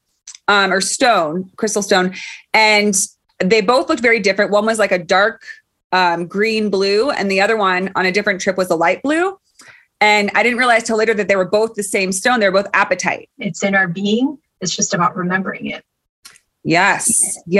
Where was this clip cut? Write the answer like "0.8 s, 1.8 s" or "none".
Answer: 13.4 s